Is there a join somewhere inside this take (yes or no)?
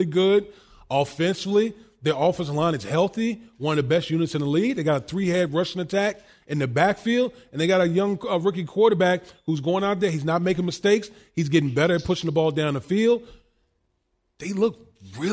no